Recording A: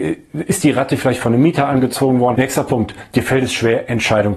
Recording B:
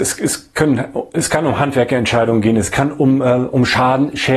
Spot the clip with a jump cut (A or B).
A